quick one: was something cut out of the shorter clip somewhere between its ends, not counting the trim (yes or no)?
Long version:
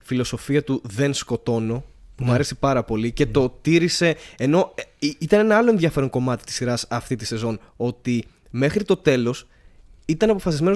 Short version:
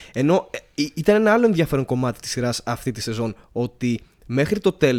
no